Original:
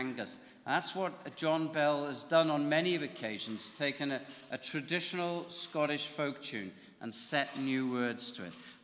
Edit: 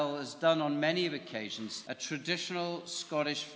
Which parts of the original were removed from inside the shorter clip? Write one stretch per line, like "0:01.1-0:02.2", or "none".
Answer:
0:03.7-0:04.5